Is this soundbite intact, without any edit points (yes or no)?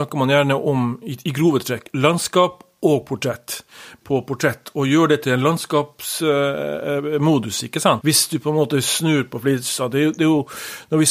no